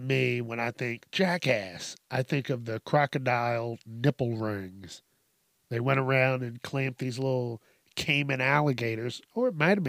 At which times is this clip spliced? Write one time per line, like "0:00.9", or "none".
none